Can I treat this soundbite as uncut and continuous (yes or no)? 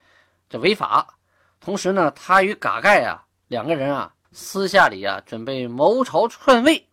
no